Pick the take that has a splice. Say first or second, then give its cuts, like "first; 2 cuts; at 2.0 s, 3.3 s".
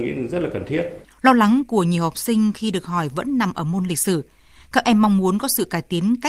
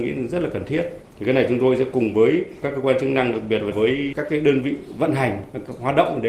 first; 1 cut; at 1.0 s